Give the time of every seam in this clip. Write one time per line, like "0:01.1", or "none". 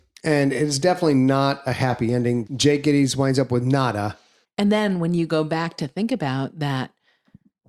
0:02.5
0:04.4